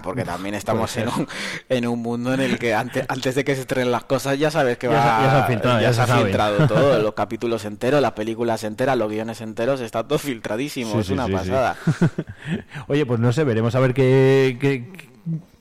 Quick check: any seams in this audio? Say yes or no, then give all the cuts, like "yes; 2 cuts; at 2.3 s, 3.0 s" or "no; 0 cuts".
no; 0 cuts